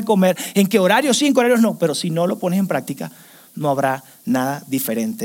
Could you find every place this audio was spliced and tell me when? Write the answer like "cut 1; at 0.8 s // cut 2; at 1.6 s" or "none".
none